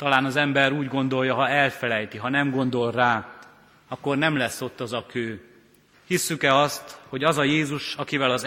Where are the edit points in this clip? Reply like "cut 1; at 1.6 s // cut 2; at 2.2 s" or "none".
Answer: cut 1; at 5.9 s